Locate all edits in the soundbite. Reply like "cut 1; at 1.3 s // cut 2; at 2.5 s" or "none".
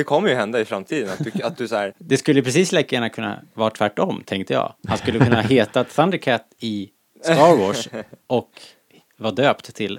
cut 1; at 1.9 s